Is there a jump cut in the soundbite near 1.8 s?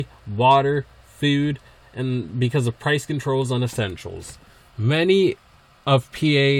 yes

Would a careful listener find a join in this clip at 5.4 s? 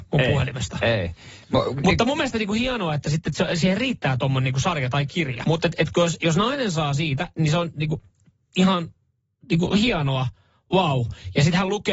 yes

